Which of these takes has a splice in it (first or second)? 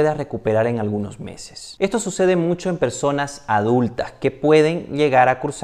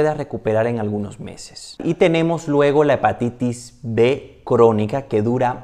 second